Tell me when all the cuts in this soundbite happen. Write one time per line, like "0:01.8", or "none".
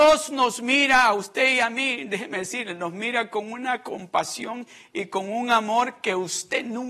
none